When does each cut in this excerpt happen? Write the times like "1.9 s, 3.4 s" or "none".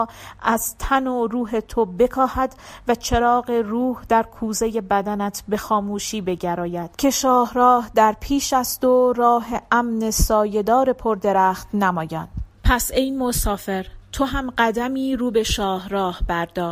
6.9 s, 12.5 s